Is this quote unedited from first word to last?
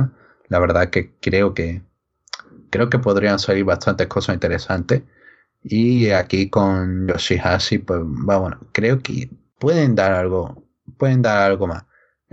yes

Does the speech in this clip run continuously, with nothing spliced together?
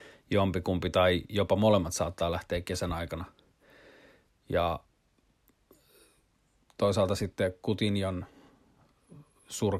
no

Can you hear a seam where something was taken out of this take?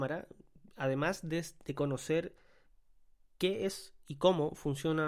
no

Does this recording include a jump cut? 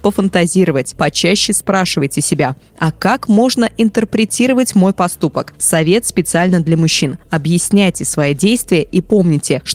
yes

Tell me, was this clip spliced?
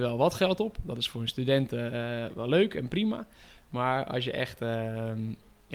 no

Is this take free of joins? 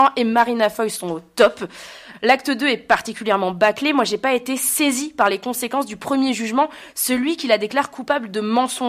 no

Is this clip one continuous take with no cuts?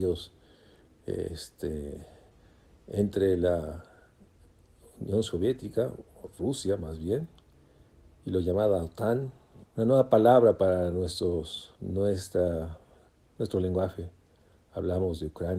no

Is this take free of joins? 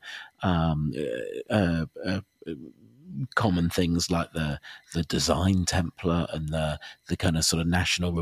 no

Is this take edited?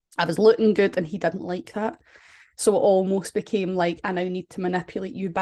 no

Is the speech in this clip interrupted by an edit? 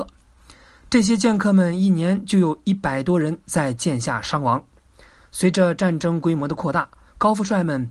no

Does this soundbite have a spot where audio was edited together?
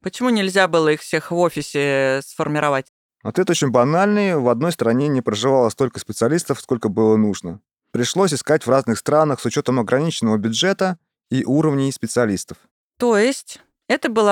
no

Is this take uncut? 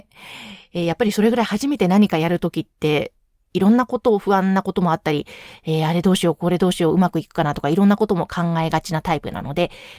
yes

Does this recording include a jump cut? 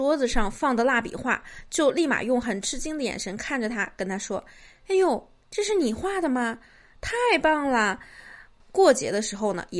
yes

